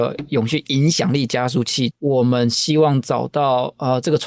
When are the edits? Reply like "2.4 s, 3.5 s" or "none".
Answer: 1.9 s